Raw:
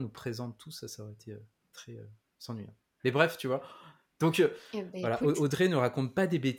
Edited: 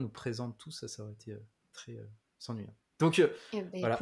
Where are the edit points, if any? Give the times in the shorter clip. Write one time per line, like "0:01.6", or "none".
0:02.9